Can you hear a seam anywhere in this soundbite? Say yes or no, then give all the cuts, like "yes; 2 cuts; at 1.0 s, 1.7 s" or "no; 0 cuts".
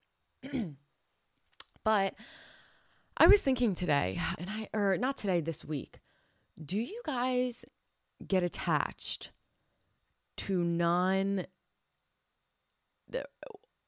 yes; 1 cut; at 4.4 s